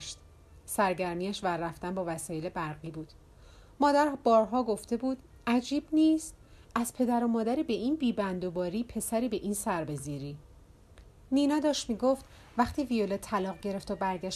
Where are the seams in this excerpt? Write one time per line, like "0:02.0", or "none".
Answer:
none